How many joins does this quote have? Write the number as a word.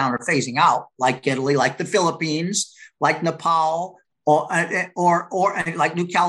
one